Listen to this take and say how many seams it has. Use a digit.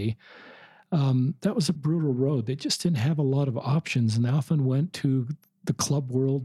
1